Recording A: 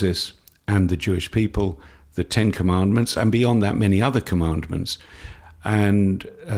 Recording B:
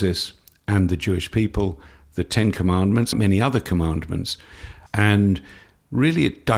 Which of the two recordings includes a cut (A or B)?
B